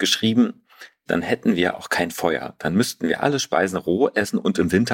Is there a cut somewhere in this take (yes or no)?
yes